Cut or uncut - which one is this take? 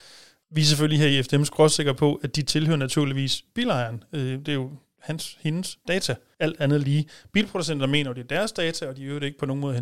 uncut